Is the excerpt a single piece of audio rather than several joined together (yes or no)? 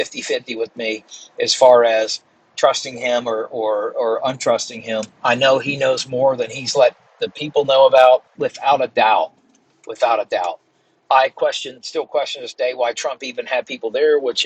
no